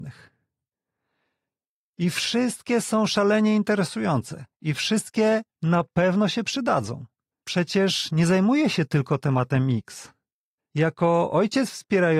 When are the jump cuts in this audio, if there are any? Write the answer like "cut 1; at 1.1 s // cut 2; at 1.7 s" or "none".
cut 1; at 4.5 s // cut 2; at 7.3 s // cut 3; at 10.6 s

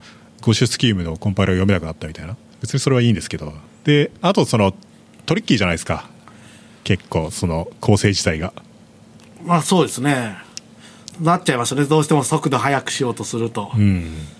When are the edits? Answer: none

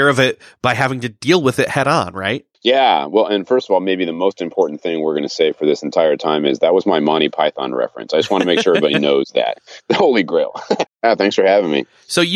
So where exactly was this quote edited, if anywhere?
cut 1; at 2.5 s // cut 2; at 10.9 s

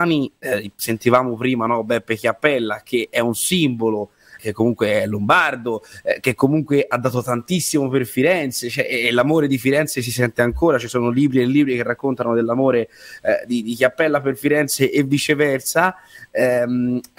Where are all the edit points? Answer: cut 1; at 4.4 s

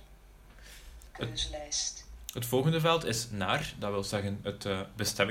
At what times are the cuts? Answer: none

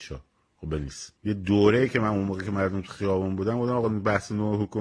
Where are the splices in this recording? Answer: cut 1; at 1.2 s

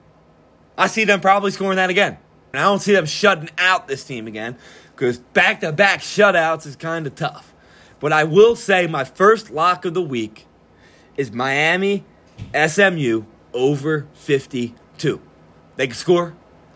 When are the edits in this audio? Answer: cut 1; at 2.5 s // cut 2; at 15.6 s

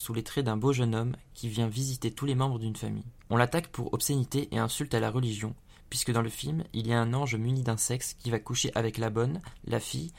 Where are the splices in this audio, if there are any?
none

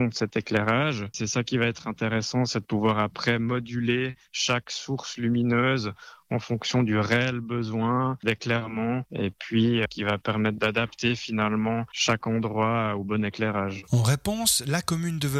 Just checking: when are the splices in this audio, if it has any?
none

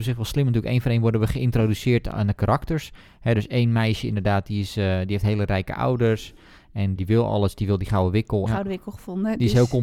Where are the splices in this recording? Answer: cut 1; at 7.0 s // cut 2; at 8.5 s

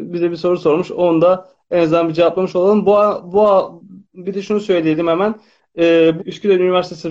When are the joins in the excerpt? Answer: cut 1; at 6.2 s

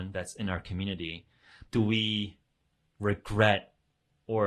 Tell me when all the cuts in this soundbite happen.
cut 1; at 1.7 s

